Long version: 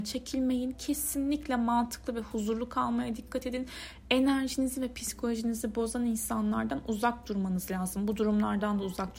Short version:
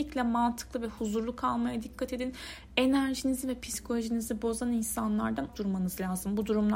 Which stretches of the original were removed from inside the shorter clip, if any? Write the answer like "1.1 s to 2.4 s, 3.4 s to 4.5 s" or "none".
6.8 s to 7.2 s